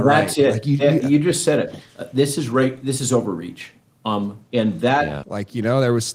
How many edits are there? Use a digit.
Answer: 1